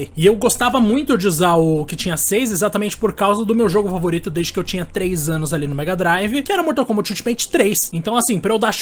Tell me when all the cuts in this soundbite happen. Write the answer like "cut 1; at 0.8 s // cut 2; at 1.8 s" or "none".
none